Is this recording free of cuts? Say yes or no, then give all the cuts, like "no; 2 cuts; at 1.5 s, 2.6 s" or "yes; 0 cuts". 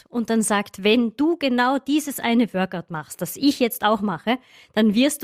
yes; 0 cuts